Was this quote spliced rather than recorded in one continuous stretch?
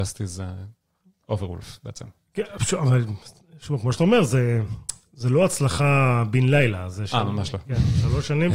no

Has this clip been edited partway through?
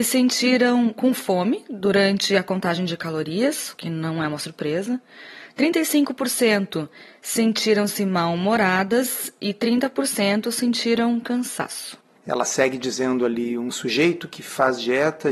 no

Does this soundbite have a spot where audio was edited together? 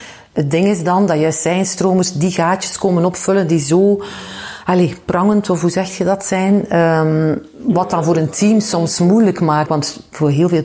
yes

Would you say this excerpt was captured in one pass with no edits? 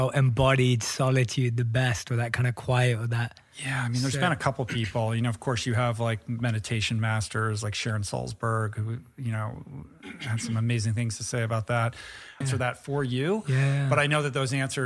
no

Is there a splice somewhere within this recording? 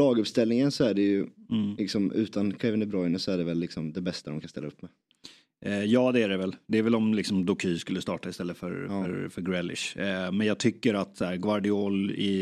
no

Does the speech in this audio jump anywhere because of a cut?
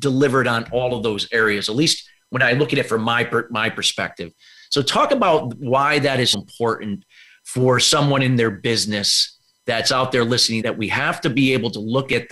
yes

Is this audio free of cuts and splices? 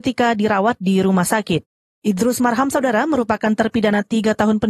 no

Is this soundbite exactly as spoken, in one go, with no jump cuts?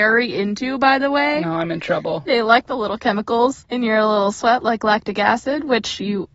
yes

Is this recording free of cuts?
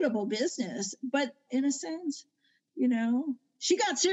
no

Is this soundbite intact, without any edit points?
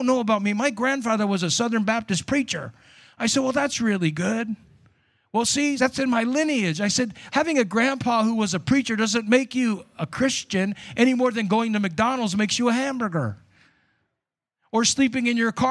no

